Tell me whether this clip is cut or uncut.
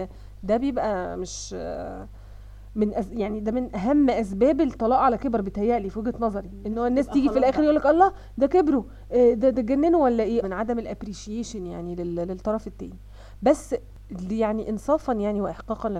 cut